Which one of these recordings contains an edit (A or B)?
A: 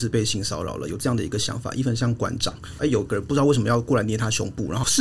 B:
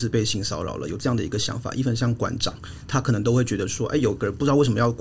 A